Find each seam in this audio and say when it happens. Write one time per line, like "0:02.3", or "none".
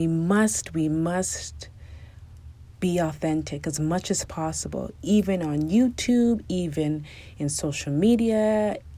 none